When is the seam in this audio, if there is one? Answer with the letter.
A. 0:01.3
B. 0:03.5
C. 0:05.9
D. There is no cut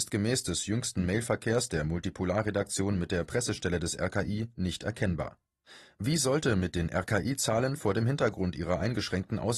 D